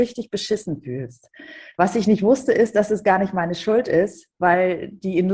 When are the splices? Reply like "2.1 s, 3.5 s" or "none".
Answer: 1.7 s